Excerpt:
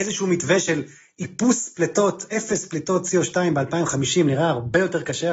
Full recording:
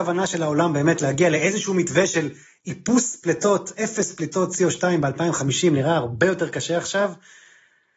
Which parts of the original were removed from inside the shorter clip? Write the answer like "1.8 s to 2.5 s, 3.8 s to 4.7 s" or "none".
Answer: none